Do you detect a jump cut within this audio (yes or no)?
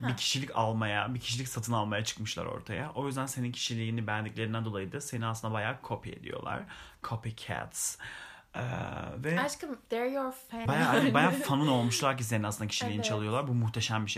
yes